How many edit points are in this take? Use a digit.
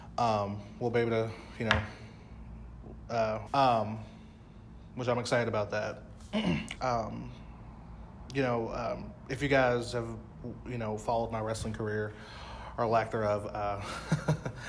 2